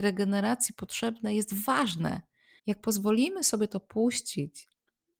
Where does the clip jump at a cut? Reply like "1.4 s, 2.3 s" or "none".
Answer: 2.6 s